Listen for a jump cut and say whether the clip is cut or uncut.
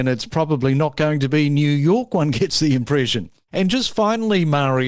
cut